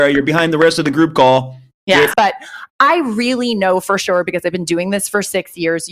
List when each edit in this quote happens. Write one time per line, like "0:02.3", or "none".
0:02.1